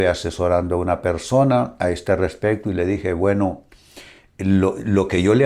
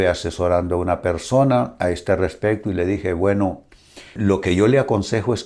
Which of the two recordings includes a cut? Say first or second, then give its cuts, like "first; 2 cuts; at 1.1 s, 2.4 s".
second; 1 cut; at 4.2 s